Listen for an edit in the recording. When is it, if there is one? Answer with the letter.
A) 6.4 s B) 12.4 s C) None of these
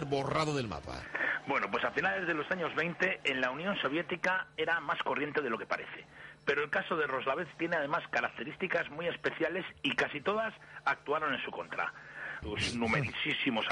B